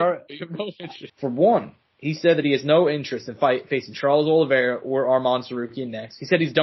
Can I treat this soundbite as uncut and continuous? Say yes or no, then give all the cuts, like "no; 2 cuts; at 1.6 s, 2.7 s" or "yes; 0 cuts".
no; 1 cut; at 1.1 s